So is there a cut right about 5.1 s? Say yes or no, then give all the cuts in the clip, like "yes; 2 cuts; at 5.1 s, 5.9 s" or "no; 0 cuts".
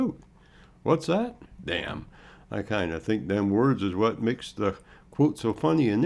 no; 1 cut; at 1.5 s